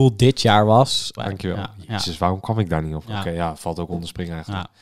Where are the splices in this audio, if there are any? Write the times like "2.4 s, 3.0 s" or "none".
1.2 s, 3.0 s